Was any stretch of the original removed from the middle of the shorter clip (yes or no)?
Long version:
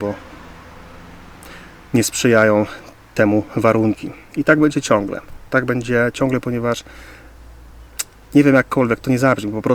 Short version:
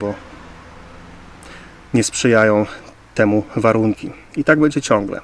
no